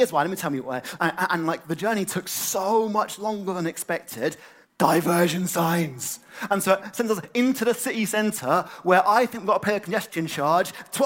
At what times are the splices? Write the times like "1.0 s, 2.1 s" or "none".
1.0 s, 4.6 s